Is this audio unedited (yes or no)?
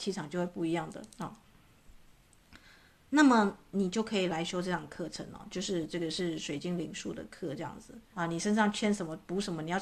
no